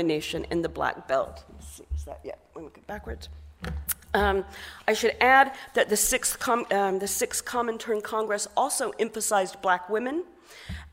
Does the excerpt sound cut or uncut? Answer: uncut